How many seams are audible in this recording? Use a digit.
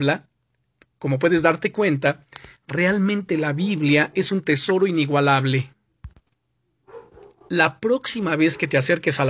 1